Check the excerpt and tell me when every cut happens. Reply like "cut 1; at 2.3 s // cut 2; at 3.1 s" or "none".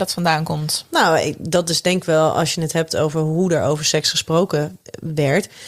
none